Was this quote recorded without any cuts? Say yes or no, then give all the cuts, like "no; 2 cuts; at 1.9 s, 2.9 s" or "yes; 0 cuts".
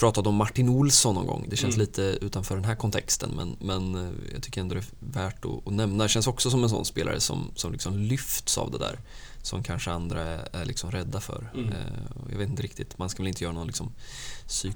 yes; 0 cuts